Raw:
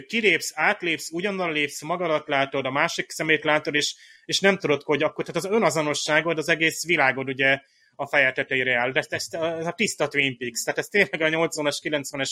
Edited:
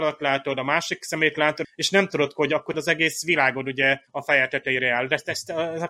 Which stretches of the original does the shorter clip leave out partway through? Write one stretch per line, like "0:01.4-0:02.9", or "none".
0:03.7-0:04.1
0:05.2-0:06.3
0:07.7-0:07.9